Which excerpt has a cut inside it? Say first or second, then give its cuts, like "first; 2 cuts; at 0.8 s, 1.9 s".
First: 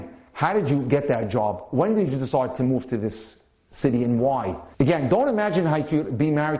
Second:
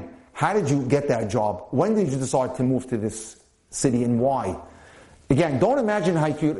first; 1 cut; at 4.7 s